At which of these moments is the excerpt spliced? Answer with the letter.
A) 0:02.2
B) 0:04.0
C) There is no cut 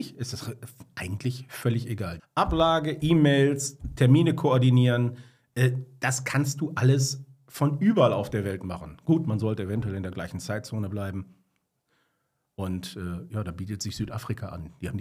A